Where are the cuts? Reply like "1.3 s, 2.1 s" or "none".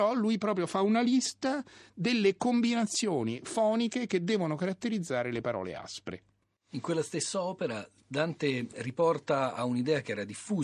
8.0 s